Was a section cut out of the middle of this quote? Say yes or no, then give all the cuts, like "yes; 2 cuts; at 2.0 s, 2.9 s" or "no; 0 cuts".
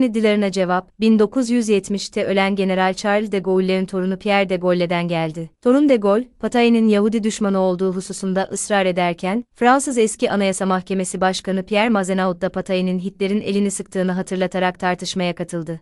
no; 0 cuts